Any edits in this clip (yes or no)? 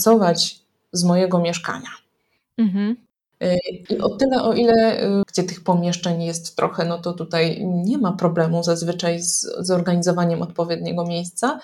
yes